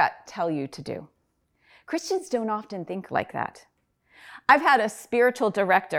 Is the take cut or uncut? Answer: uncut